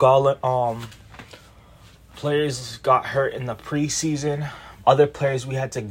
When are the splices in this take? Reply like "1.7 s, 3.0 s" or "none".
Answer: 4.8 s